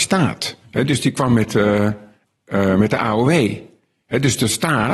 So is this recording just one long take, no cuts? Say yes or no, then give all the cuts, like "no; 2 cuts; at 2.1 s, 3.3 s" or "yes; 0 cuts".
yes; 0 cuts